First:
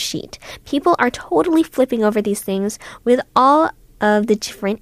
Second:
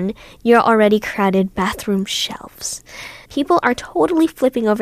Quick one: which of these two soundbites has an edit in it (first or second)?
second